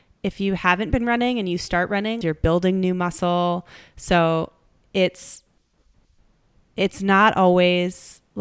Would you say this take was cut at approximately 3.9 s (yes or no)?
no